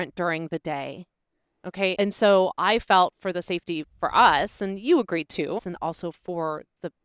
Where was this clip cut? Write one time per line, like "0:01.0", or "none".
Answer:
0:01.9
0:05.6